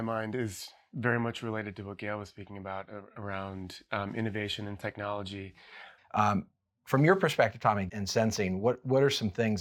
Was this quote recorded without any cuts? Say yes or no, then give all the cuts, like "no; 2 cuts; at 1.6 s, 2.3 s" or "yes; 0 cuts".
no; 2 cuts; at 6.0 s, 7.9 s